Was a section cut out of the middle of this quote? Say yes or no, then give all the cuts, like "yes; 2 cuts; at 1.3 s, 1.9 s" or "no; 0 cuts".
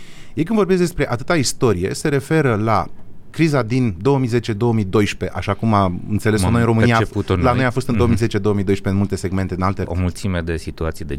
yes; 1 cut; at 9.8 s